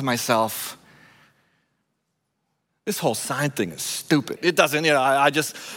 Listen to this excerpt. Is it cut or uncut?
cut